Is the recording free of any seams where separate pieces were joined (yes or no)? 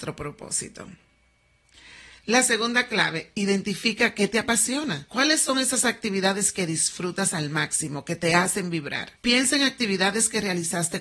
yes